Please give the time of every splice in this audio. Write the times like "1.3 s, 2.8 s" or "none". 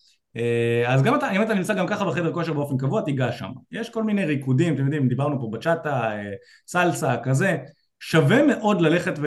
none

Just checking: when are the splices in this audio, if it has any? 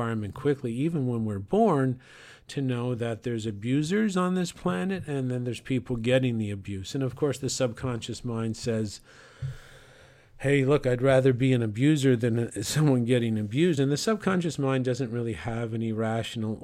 none

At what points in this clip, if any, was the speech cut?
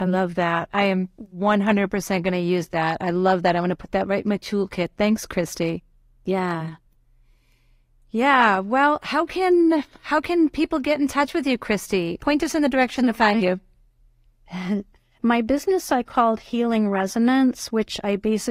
6.1 s, 15.2 s

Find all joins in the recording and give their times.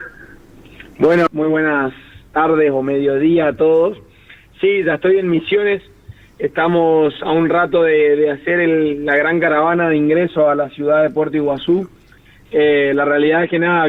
1.3 s

